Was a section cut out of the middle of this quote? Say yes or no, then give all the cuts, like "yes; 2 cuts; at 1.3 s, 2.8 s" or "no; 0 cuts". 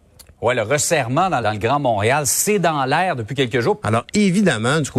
yes; 2 cuts; at 1.4 s, 3.8 s